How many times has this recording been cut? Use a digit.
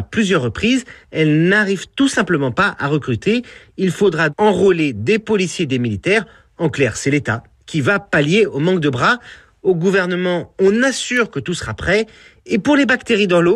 2